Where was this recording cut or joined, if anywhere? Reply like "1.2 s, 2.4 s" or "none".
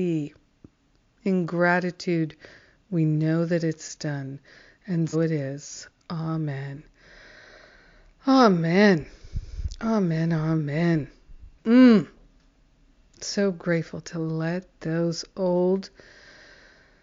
5.1 s, 11.6 s